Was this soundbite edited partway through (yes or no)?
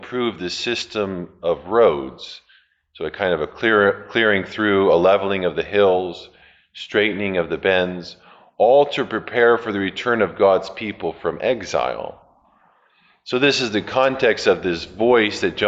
no